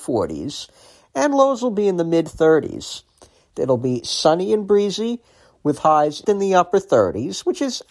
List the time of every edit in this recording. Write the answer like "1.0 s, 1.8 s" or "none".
3.5 s, 6.2 s